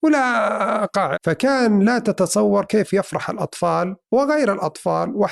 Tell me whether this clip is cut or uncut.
cut